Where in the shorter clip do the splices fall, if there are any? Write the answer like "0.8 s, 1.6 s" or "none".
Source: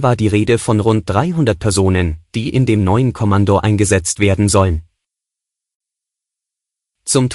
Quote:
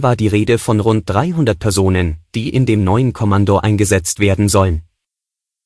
none